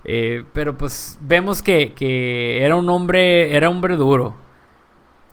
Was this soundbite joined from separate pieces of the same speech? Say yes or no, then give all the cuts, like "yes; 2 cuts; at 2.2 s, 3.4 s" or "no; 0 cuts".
yes; 1 cut; at 1.9 s